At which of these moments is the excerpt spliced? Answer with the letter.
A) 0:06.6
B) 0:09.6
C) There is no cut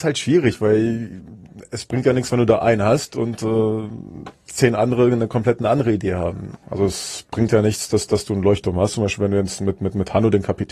A